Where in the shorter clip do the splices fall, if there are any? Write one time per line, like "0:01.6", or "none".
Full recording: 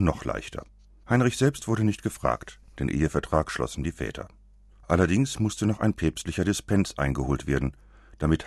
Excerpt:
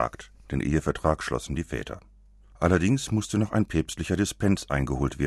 none

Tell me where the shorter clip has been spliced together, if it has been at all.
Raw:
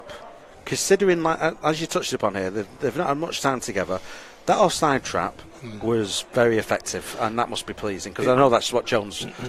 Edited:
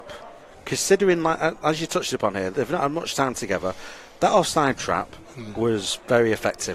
0:02.5

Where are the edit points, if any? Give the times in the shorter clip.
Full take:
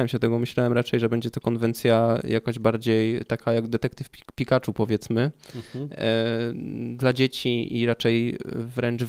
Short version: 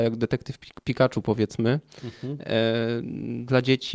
none

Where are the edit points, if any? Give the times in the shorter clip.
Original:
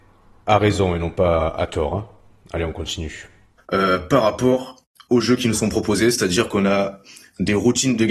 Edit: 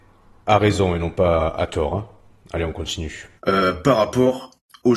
0:03.4

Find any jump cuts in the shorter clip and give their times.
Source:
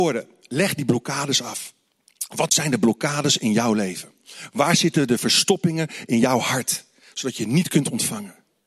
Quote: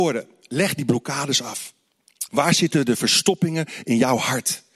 0:02.3

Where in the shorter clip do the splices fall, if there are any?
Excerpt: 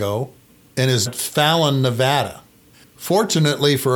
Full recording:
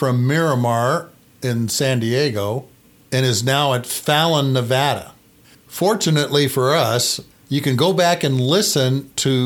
0:01.1

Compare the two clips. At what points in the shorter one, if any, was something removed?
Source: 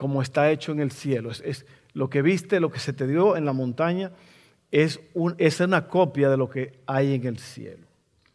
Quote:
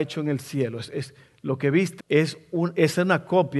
0:02.0

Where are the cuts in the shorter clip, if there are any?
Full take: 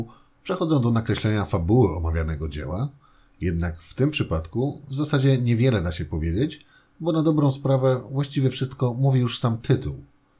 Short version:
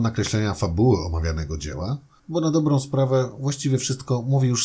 0:02.2

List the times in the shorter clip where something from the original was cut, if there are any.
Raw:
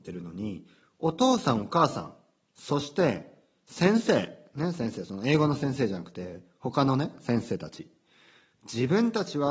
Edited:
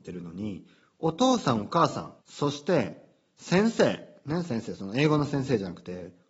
0:02.2

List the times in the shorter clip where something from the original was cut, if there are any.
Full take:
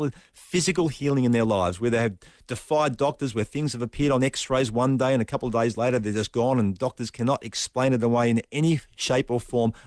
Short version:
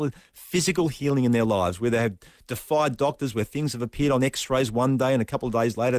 none

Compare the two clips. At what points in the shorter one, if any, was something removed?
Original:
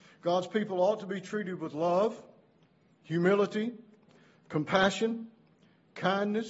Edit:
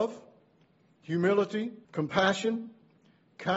0:01.8

